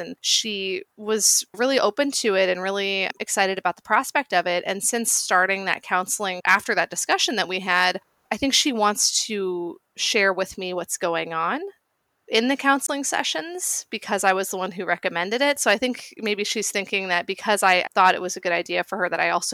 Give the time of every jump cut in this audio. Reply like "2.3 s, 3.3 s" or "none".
none